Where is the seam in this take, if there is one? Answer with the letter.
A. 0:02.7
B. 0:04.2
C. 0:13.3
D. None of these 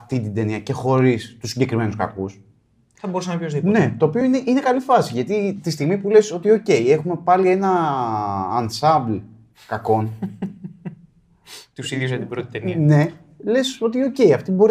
D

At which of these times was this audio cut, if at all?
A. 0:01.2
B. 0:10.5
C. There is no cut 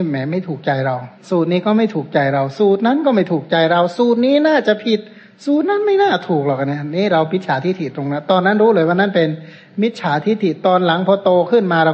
A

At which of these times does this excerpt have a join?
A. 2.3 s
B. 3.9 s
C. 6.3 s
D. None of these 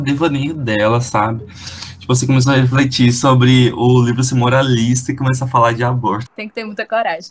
C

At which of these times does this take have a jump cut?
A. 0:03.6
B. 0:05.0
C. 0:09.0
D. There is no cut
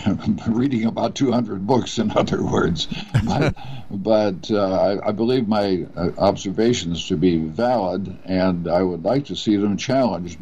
A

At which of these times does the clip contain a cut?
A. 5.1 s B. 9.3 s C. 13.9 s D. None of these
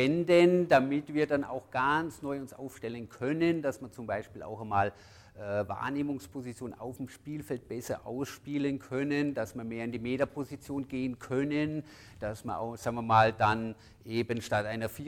D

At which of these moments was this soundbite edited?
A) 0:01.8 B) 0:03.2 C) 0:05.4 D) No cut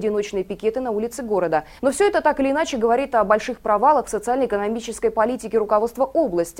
A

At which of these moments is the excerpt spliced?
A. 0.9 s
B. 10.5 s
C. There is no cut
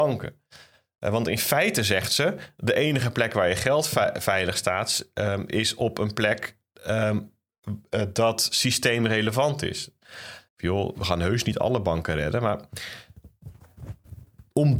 B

